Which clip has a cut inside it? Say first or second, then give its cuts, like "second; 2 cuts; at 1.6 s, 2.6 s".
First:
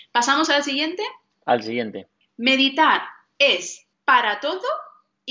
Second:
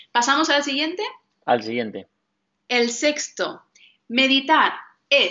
first; 2 cuts; at 2.2 s, 3.9 s